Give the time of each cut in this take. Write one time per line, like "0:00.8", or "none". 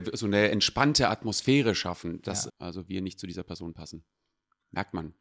0:02.5